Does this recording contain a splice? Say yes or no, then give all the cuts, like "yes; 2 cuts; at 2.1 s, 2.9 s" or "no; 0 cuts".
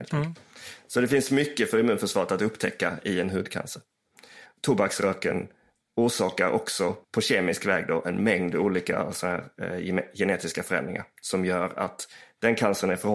yes; 2 cuts; at 4.5 s, 7.0 s